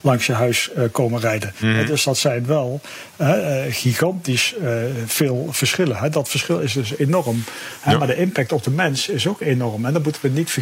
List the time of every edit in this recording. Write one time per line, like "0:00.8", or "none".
none